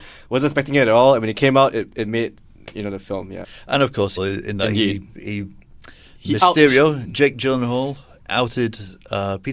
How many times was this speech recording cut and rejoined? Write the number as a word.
one